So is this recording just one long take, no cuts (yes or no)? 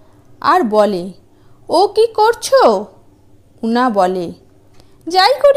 yes